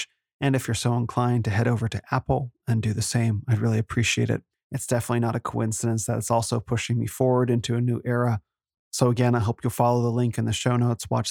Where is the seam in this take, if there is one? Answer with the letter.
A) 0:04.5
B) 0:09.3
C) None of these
A